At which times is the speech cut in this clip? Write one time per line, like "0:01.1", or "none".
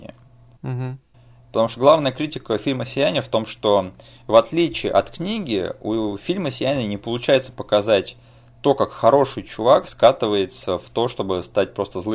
none